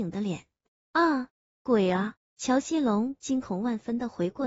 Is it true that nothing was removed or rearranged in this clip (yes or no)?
no